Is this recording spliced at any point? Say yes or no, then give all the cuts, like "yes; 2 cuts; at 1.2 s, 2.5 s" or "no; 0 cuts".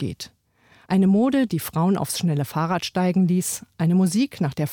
no; 0 cuts